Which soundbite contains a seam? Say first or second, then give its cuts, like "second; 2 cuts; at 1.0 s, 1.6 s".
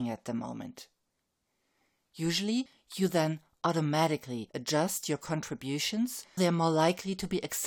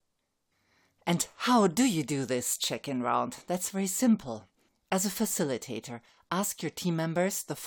first; 1 cut; at 6.4 s